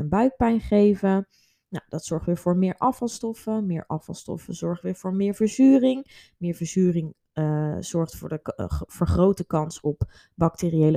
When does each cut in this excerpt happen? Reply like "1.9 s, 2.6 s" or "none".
none